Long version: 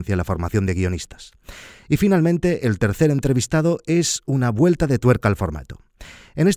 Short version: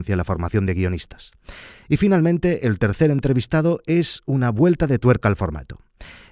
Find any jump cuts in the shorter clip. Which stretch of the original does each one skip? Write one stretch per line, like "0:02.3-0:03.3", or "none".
none